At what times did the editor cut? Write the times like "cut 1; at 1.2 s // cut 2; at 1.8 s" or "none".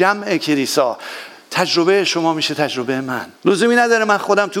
cut 1; at 3.4 s